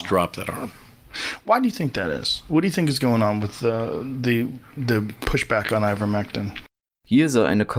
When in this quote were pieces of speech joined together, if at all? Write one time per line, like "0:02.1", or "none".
none